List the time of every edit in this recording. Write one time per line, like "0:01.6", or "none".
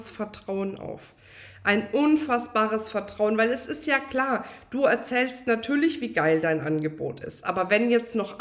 none